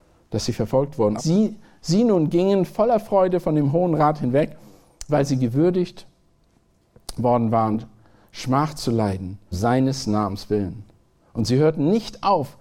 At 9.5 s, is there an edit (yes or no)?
yes